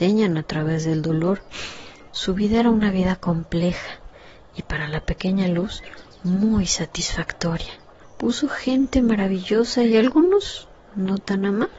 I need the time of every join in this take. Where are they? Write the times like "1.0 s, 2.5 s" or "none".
2.1 s, 8.0 s